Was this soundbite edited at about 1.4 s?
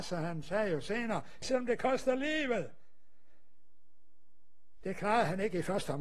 yes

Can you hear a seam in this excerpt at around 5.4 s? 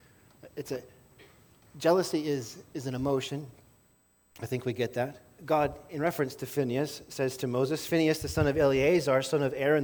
yes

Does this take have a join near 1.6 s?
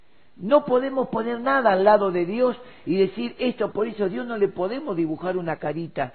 no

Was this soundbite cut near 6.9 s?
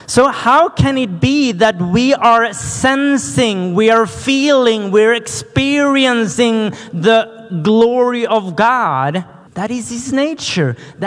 no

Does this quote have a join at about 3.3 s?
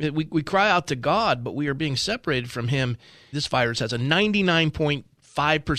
yes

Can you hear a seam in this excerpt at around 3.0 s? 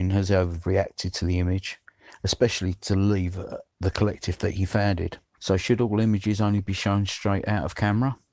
no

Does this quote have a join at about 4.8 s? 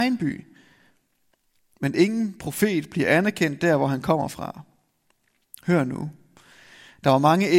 no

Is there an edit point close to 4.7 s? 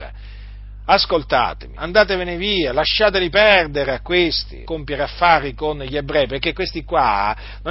yes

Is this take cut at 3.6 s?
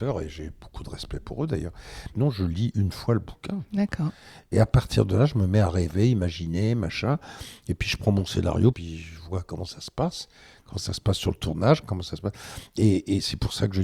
no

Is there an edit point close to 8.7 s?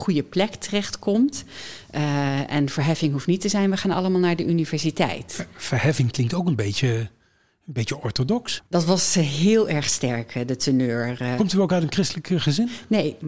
yes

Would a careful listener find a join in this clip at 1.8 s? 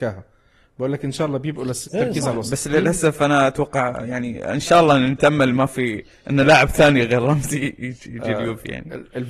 yes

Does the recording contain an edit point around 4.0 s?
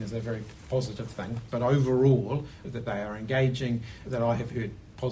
yes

